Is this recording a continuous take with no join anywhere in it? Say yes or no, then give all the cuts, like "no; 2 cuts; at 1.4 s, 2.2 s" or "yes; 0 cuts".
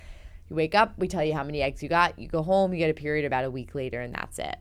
yes; 0 cuts